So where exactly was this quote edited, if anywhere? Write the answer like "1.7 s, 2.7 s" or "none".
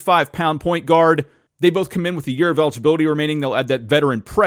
1.5 s